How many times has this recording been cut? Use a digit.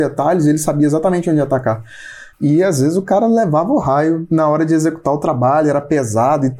1